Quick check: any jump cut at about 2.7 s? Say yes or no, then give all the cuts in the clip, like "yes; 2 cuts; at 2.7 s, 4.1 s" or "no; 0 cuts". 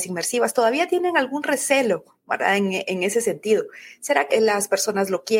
no; 1 cut; at 4.3 s